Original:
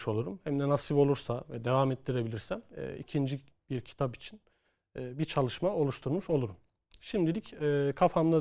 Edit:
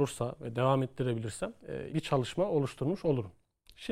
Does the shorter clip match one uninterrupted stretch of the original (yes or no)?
no